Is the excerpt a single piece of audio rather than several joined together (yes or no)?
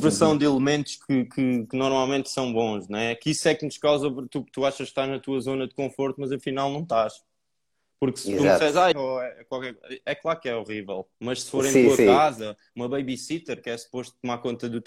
no